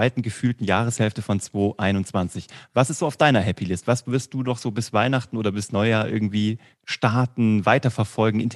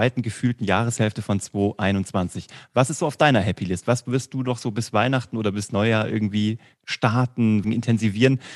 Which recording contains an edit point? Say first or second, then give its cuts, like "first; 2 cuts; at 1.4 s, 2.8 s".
second; 1 cut; at 7.6 s